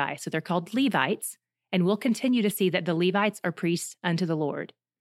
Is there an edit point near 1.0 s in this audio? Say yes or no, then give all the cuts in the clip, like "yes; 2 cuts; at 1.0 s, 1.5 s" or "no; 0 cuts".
no; 0 cuts